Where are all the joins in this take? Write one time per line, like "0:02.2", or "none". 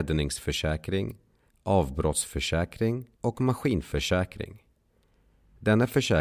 0:01.5
0:03.1